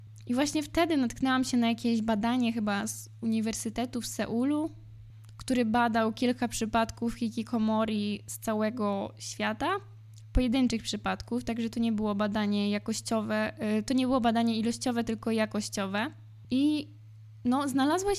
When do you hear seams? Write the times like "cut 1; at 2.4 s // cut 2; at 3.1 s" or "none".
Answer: none